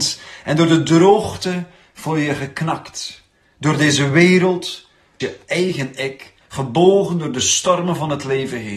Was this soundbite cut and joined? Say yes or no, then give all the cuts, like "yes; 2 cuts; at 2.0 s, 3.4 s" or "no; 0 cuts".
yes; 1 cut; at 5.2 s